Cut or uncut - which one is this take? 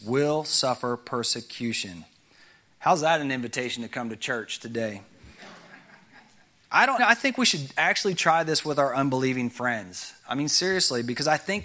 cut